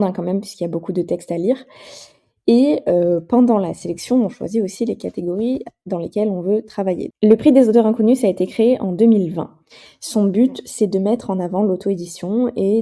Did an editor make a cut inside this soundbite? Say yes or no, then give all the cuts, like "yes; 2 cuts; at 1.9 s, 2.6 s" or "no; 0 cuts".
yes; 1 cut; at 7.1 s